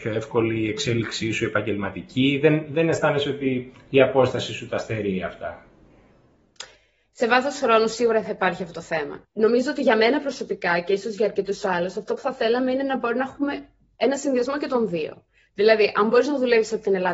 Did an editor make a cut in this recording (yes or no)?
yes